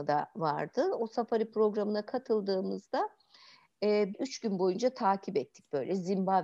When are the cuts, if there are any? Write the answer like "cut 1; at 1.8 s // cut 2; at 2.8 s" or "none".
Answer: cut 1; at 4.1 s